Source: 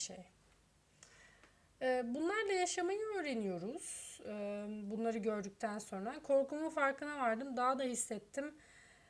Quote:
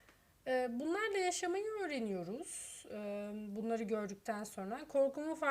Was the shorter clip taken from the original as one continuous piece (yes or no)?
yes